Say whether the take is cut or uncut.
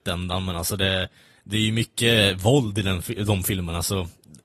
uncut